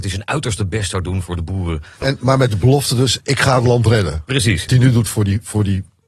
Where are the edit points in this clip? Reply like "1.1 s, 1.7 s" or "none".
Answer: 2.0 s, 4.7 s